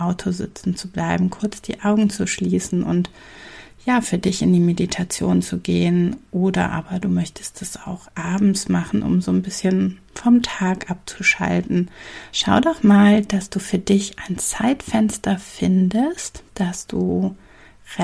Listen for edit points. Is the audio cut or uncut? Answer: uncut